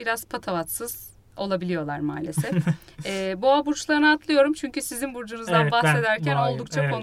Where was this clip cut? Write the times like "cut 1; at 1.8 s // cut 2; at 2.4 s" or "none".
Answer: none